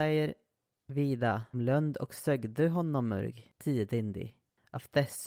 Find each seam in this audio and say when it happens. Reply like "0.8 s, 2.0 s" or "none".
1.5 s

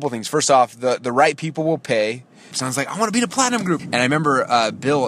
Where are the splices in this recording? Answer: 2.5 s, 3.8 s

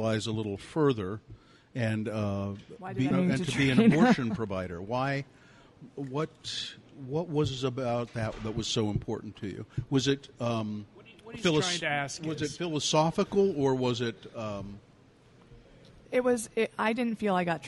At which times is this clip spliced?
3.1 s

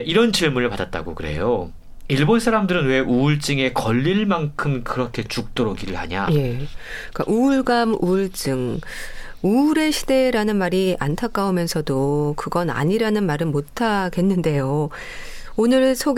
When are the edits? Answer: 6.3 s

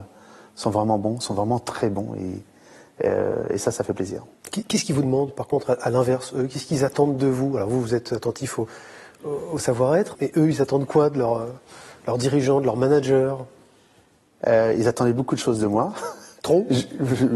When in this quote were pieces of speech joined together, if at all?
10.1 s

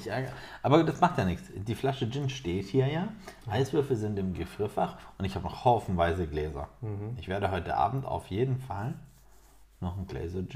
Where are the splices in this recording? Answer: none

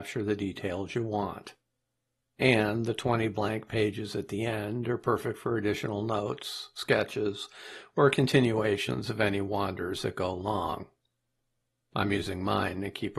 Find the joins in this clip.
none

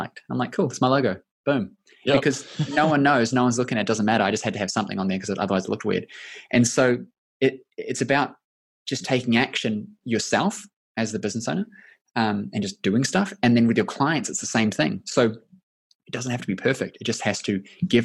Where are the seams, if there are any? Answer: none

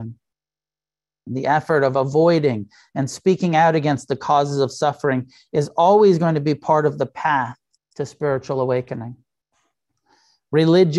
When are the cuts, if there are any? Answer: 1.3 s

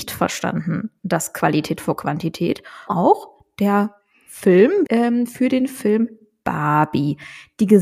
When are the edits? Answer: 2.9 s, 4.9 s

